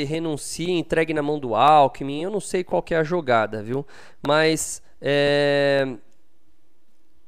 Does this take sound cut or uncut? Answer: uncut